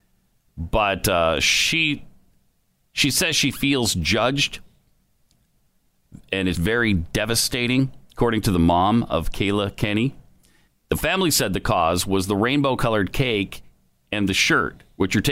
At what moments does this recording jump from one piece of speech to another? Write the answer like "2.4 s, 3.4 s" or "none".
6.5 s, 10.7 s